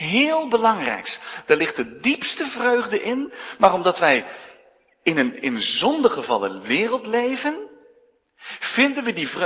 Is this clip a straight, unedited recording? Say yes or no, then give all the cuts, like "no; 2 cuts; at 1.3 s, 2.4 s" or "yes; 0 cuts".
yes; 0 cuts